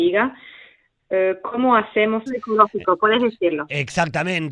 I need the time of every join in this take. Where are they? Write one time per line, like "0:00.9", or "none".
0:02.3